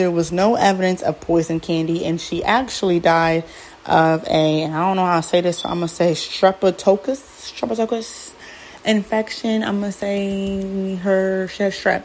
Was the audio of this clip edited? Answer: no; 0 cuts

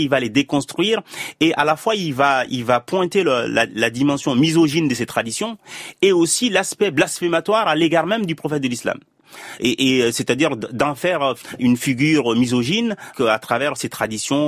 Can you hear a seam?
no; 0 cuts

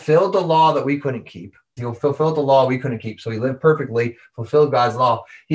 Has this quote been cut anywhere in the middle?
yes; 1 cut; at 1.8 s

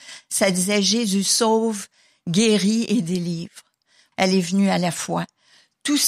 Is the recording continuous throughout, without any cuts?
no; 1 cut; at 4.1 s

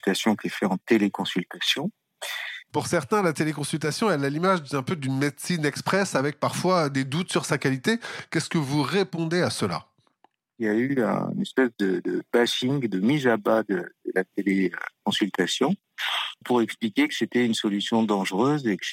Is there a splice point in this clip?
yes; 2 cuts; at 2.7 s, 16.4 s

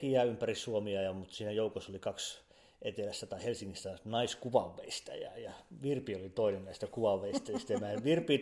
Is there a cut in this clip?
no; 0 cuts

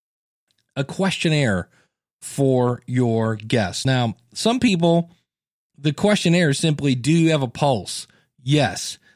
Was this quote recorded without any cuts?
yes; 0 cuts

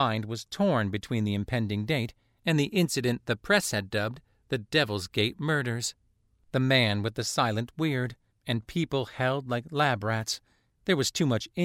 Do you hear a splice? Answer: yes; 1 cut; at 8.3 s

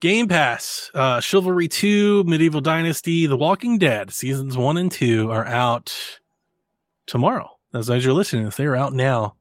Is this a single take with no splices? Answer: yes; 0 cuts

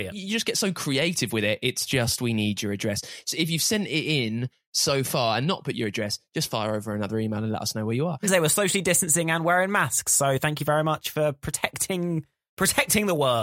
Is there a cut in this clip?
yes; 1 cut; at 8.2 s

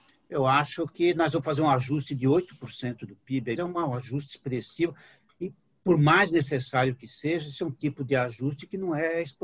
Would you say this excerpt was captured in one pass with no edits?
no; 1 cut; at 3.6 s

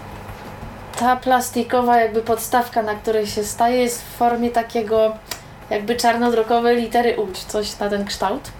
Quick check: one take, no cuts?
no; 1 cut; at 7.3 s

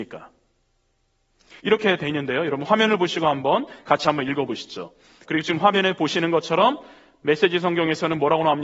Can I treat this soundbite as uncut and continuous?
no; 2 cuts; at 1.6 s, 5.2 s

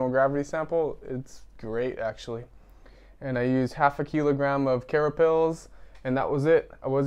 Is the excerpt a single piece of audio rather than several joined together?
yes; 0 cuts

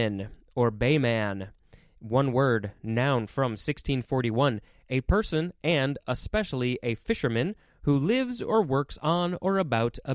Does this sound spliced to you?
no; 0 cuts

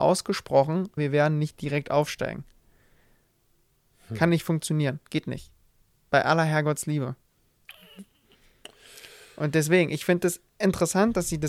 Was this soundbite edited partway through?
yes; 1 cut; at 1.0 s

